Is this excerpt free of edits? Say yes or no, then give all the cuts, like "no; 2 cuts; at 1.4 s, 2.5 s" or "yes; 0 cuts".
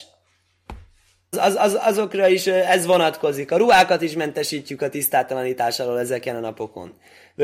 no; 1 cut; at 1.3 s